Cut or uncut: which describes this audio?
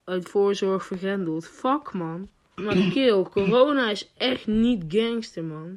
cut